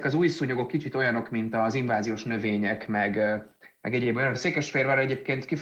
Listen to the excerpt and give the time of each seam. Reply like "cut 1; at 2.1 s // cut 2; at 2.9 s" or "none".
cut 1; at 4.3 s